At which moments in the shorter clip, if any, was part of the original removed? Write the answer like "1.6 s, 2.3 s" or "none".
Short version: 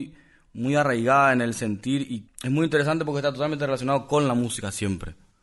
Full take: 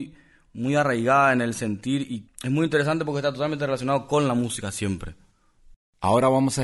none